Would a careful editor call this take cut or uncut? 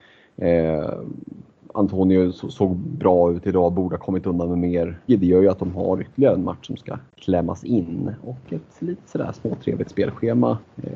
cut